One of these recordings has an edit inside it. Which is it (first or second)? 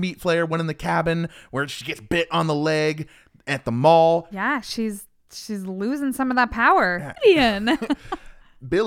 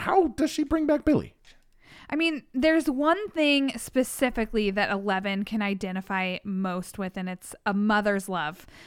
first